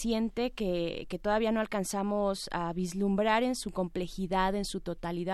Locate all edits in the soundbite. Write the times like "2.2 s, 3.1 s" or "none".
none